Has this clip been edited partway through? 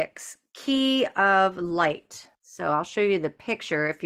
yes; 1 cut; at 2.3 s

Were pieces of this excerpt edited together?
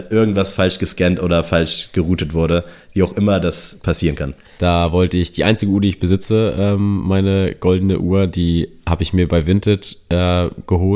yes; 1 cut; at 4.6 s

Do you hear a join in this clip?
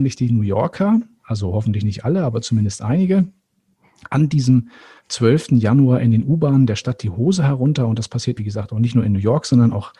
yes; 1 cut; at 8.4 s

